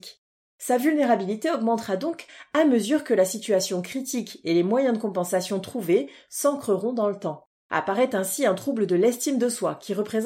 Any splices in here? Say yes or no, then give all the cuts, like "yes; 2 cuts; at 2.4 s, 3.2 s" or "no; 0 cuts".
yes; 1 cut; at 7.6 s